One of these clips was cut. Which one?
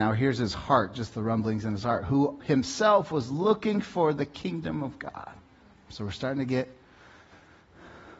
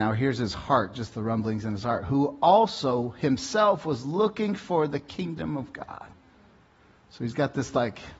first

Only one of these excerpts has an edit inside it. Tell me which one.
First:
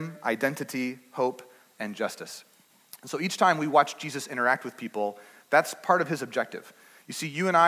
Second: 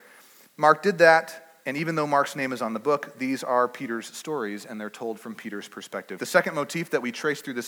second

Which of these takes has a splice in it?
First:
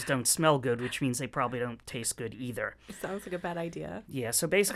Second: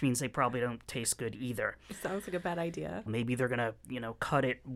second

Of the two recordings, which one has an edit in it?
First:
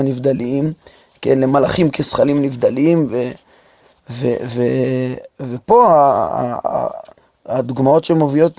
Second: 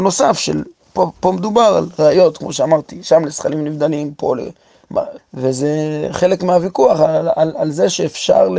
second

